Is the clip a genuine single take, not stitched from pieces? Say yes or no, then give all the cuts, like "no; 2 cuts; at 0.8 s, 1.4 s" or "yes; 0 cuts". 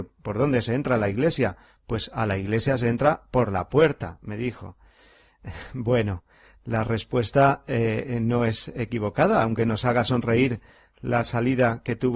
yes; 0 cuts